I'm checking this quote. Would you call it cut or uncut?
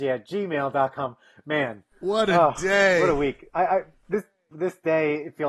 cut